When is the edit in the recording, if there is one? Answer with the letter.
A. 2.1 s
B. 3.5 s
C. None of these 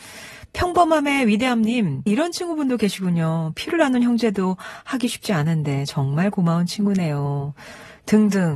A